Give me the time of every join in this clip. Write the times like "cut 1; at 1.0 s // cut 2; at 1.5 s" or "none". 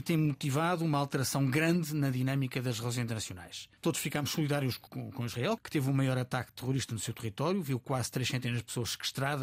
cut 1; at 3.8 s